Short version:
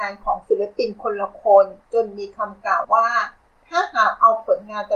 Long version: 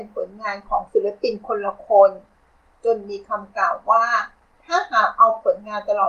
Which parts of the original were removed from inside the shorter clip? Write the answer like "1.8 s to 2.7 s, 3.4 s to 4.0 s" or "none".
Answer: 2.3 s to 2.8 s, 3.8 s to 3.8 s